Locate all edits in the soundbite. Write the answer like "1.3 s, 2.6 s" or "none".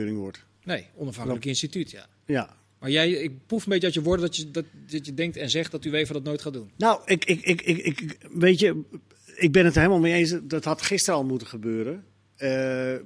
none

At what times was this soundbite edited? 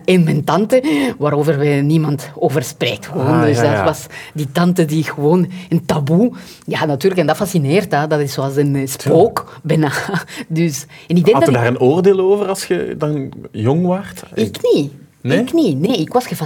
none

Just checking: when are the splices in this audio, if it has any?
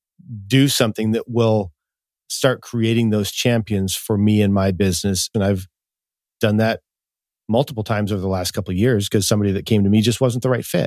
5.3 s

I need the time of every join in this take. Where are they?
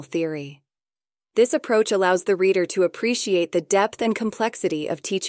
none

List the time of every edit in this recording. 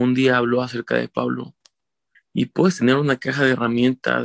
2.1 s

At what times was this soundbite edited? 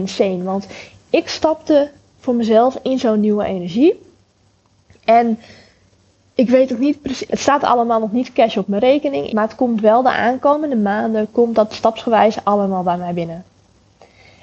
7.3 s, 9.3 s

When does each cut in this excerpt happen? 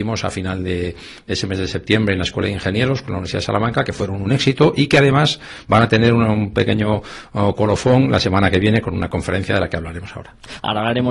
none

